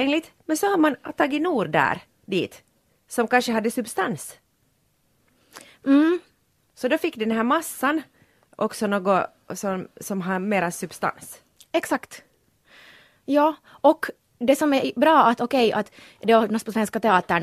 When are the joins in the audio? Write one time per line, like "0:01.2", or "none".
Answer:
none